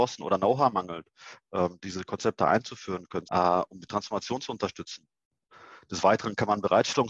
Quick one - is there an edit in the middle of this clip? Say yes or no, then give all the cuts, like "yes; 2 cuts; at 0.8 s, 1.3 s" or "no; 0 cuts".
yes; 1 cut; at 3.3 s